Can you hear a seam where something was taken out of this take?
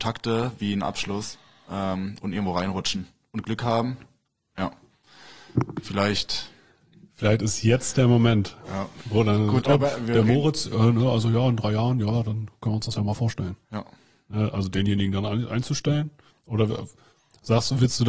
no; 0 cuts

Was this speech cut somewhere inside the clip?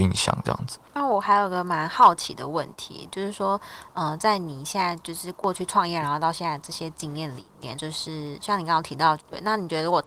yes; 2 cuts; at 7.8 s, 9.2 s

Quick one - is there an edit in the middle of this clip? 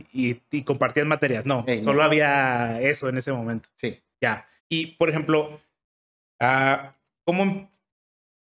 yes; 2 cuts; at 4.6 s, 7.2 s

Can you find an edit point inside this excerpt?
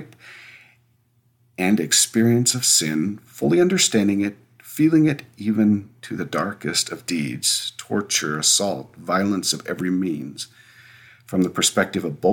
no; 0 cuts

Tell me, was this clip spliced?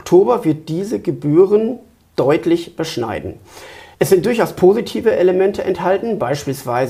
yes; 1 cut; at 3.9 s

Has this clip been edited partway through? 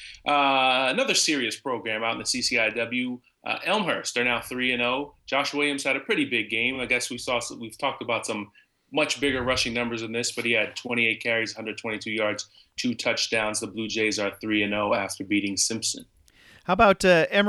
no; 0 cuts

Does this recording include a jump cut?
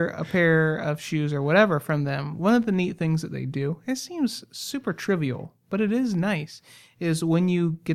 no; 0 cuts

